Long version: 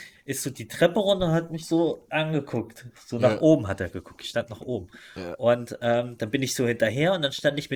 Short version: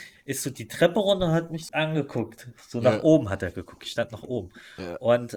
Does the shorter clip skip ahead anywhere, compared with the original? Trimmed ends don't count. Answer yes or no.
yes